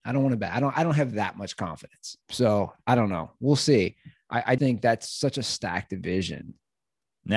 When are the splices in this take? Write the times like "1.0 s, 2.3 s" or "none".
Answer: 2.2 s, 4.6 s